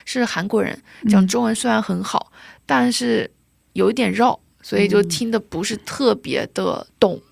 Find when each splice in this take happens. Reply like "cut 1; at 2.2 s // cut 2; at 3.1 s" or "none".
none